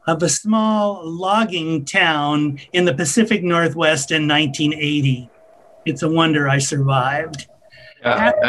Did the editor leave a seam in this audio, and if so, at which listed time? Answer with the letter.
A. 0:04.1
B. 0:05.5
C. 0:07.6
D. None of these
D